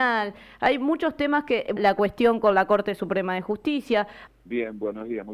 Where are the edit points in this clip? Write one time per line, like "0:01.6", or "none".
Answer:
0:01.8
0:04.3